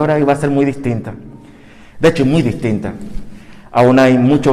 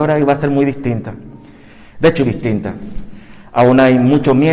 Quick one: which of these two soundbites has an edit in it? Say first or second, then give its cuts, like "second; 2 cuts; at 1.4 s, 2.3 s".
second; 1 cut; at 2.2 s